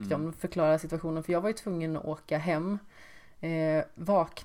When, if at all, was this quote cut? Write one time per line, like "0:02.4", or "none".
none